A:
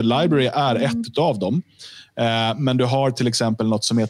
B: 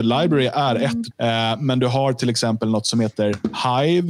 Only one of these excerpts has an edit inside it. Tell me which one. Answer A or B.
B